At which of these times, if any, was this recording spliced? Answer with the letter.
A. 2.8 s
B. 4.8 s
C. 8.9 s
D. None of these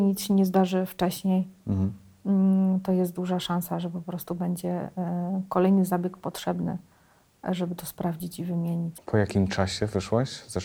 C